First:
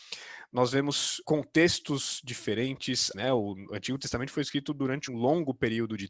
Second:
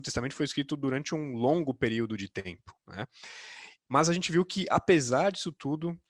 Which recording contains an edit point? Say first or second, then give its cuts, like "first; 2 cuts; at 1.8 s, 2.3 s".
first; 3 cuts; at 1.2 s, 3.1 s, 5.1 s